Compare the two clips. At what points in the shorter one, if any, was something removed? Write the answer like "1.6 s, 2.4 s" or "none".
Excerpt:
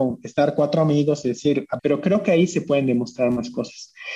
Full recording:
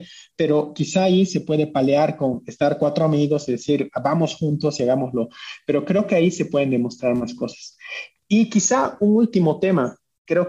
1.8 s

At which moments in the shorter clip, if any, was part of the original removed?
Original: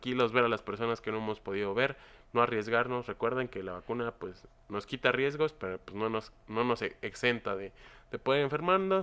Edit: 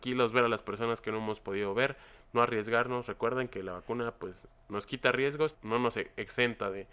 5.5 s

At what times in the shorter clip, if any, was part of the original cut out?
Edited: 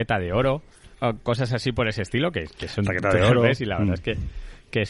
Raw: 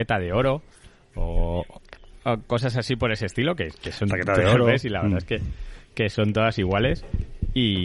0.9 s

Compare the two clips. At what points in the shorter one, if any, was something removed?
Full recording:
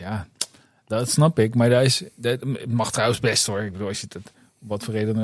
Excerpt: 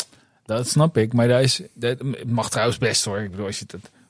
none

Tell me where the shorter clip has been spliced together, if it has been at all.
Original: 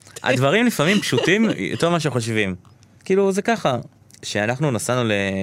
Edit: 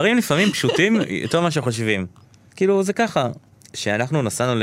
none

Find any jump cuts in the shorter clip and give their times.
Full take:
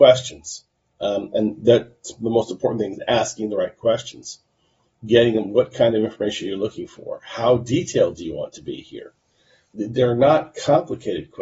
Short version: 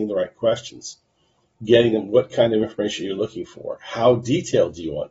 none

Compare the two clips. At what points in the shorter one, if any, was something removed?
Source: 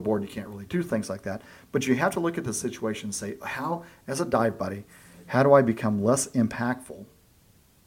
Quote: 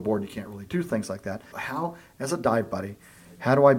1.5 s

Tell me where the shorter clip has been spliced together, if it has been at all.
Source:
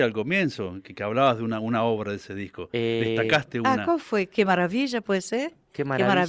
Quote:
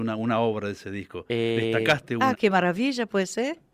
2.3 s

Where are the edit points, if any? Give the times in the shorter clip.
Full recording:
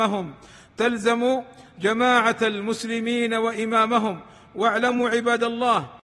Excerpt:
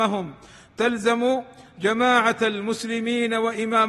none

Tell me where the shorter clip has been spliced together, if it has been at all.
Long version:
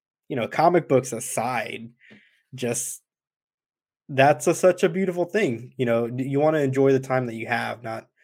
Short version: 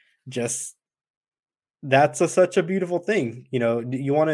none

